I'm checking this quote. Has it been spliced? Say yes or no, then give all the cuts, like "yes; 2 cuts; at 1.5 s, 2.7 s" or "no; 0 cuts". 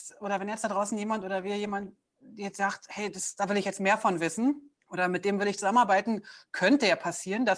yes; 1 cut; at 4.8 s